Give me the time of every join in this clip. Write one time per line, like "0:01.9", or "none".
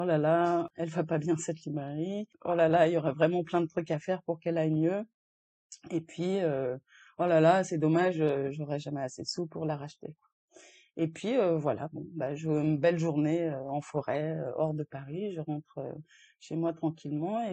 none